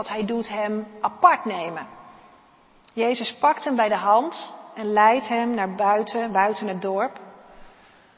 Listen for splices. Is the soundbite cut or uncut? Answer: uncut